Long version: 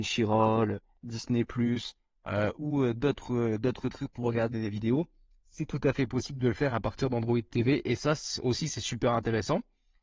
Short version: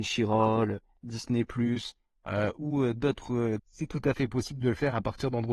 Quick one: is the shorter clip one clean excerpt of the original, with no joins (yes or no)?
no